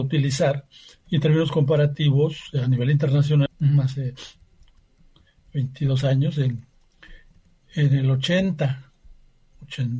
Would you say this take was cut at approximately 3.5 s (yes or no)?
yes